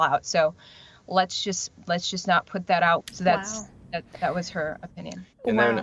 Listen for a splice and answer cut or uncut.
cut